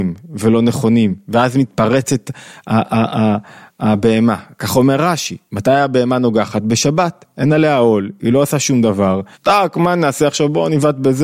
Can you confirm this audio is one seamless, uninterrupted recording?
no; 1 cut; at 9.3 s

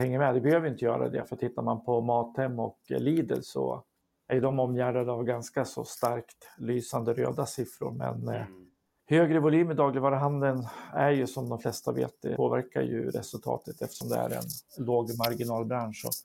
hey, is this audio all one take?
no; 1 cut; at 12.3 s

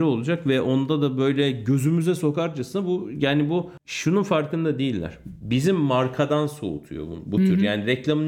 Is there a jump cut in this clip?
no; 0 cuts

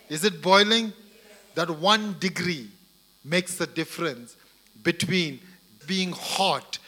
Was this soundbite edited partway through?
yes; 1 cut; at 5.8 s

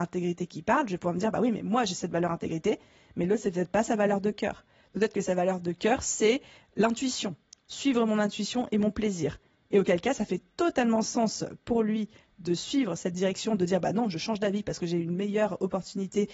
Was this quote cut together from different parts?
no; 0 cuts

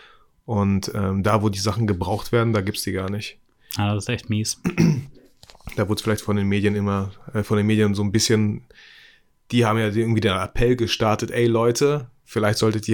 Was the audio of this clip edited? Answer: no; 0 cuts

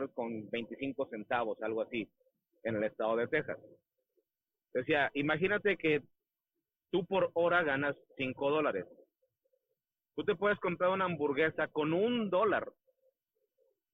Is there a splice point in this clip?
no; 0 cuts

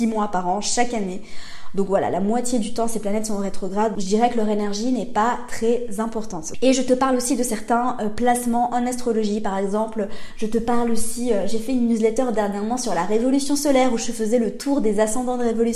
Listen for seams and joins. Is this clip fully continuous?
no; 3 cuts; at 4.0 s, 6.5 s, 10.3 s

